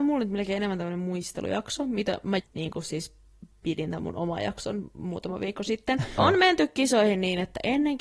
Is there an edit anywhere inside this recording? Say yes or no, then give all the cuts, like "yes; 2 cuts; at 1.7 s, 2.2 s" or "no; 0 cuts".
yes; 2 cuts; at 2.4 s, 6.2 s